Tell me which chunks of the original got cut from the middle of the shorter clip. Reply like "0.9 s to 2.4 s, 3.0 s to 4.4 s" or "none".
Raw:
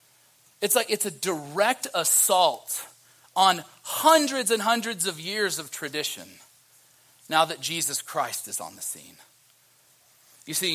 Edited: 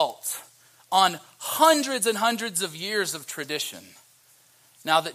none

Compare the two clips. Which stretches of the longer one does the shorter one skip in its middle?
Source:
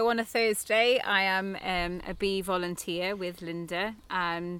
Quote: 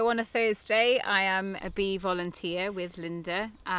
1.6 s to 2.0 s

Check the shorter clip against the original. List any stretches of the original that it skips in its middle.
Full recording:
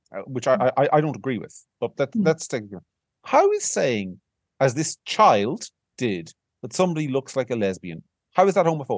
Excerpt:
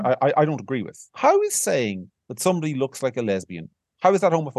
1.6 s to 3.2 s, 4.3 s to 6.5 s

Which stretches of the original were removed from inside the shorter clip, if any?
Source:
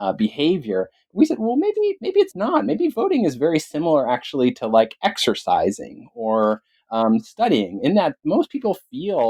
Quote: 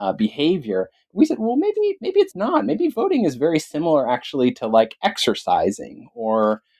none

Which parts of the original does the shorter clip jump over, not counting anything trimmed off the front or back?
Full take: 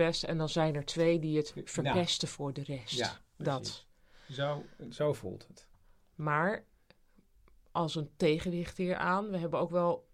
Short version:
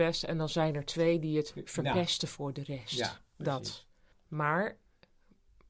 4.1 s to 6.0 s

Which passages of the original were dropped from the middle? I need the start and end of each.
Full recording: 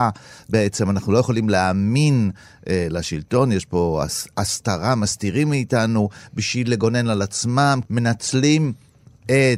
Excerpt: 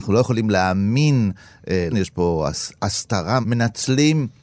2.9 s to 3.5 s, 5.0 s to 7.9 s

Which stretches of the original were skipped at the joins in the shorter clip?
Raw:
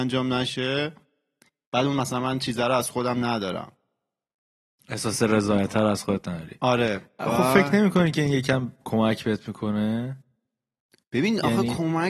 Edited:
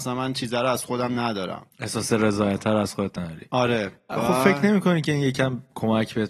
3.8 s to 4.8 s

